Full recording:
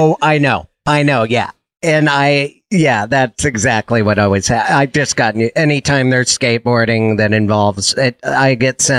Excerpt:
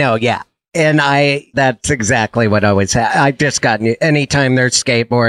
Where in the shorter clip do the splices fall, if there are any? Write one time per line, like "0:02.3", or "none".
0:01.5